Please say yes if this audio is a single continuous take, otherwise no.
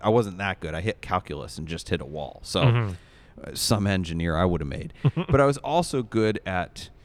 yes